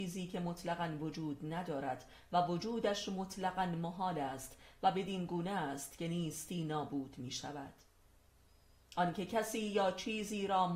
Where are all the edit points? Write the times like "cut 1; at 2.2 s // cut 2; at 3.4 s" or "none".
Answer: none